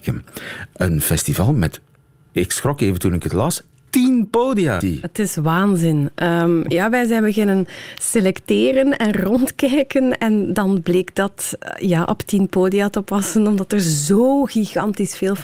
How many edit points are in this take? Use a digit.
1